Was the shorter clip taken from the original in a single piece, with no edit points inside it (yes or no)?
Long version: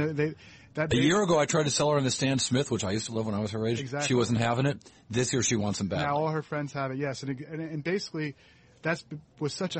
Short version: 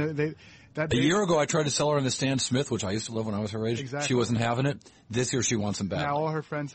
yes